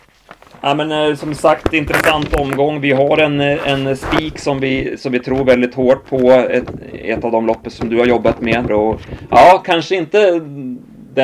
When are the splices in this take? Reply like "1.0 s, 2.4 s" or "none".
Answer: 8.7 s